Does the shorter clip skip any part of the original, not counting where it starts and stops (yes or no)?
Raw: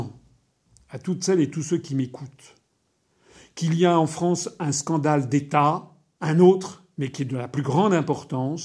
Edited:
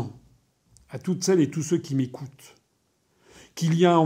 no